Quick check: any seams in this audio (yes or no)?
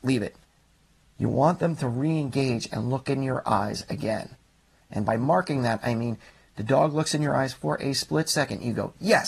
yes